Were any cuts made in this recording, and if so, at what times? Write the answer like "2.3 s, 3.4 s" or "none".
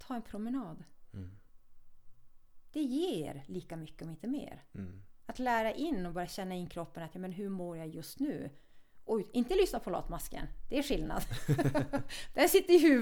none